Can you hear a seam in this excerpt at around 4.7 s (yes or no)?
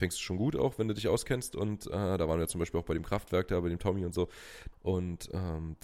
yes